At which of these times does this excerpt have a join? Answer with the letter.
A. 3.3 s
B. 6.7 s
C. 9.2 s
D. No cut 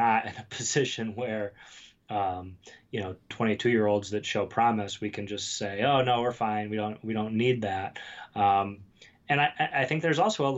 A